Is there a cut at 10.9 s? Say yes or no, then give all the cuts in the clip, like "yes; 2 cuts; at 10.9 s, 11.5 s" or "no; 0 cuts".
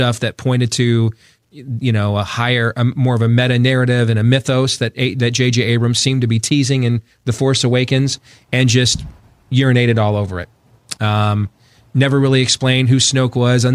no; 0 cuts